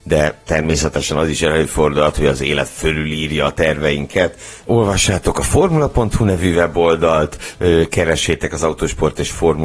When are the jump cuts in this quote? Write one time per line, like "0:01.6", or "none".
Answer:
0:04.6